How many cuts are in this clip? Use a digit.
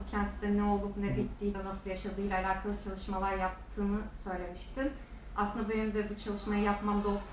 1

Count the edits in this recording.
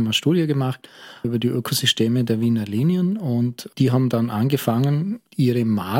1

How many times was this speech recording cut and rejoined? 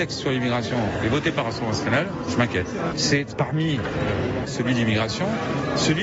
2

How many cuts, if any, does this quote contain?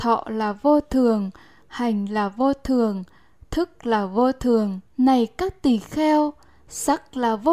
2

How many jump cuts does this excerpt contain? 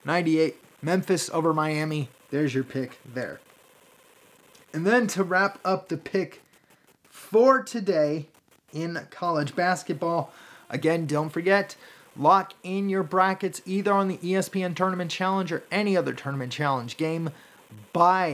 1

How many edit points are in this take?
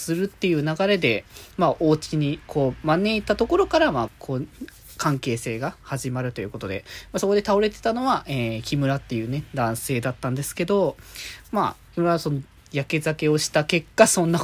1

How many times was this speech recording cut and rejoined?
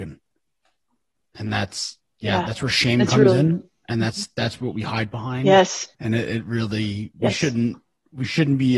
1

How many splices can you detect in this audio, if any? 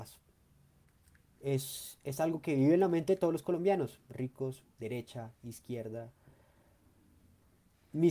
2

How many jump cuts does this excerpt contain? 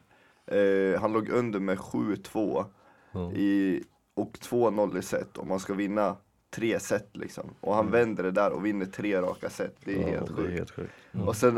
1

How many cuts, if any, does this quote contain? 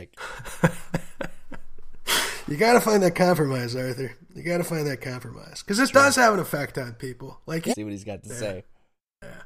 1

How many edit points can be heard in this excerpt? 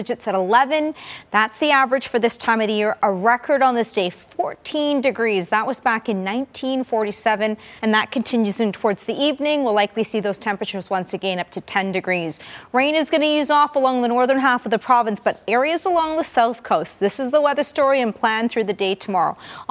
2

